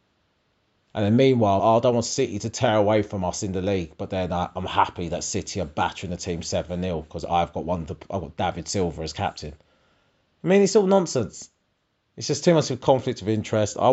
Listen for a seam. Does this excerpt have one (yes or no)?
yes